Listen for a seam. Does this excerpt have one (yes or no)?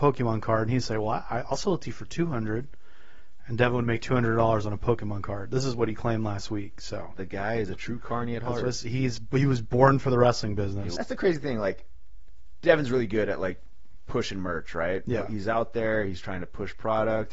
yes